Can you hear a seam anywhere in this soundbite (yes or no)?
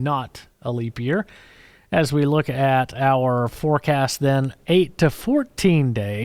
no